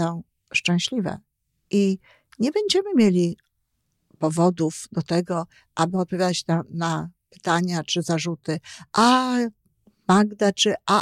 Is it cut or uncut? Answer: uncut